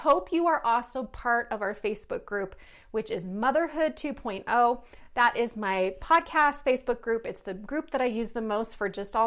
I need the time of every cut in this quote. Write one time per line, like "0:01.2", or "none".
none